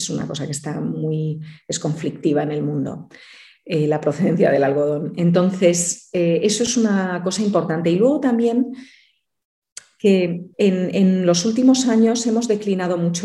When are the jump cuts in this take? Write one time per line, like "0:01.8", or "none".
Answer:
0:10.5